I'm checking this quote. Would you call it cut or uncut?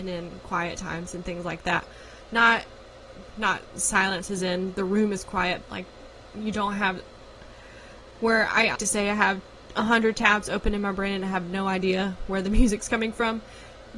cut